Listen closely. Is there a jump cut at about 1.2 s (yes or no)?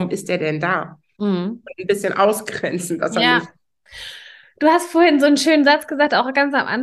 yes